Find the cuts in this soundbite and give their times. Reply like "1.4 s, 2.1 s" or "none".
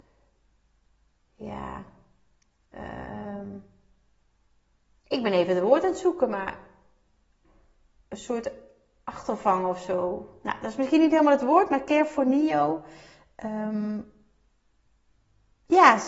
none